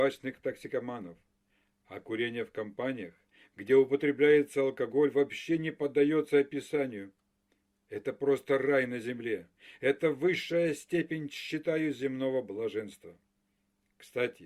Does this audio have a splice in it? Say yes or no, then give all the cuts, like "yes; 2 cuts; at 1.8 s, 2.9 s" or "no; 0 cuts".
no; 0 cuts